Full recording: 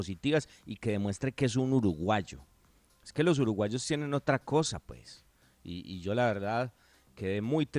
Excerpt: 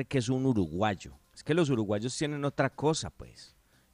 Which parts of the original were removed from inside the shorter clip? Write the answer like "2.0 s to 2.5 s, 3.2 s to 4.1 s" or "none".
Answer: 2.5 s to 2.9 s